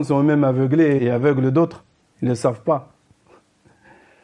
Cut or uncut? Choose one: cut